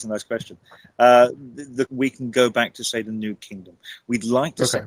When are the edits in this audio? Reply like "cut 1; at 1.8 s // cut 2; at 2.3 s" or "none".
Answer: cut 1; at 1.9 s